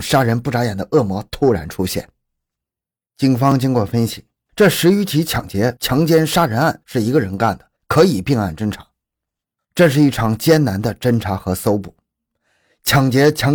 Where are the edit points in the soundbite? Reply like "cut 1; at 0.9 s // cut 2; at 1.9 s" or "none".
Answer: cut 1; at 4.5 s